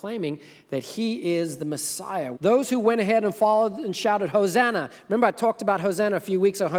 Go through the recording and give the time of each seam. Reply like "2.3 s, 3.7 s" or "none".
2.4 s